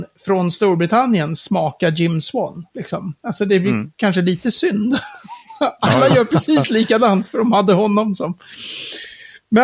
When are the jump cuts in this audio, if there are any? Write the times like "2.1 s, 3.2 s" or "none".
none